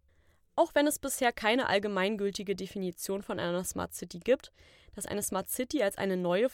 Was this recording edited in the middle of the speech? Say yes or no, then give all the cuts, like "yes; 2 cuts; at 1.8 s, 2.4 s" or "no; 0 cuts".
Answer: yes; 1 cut; at 4.8 s